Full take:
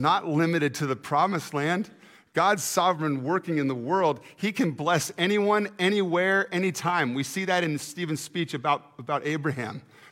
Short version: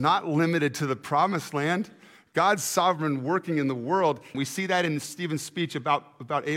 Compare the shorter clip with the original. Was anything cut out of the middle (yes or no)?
yes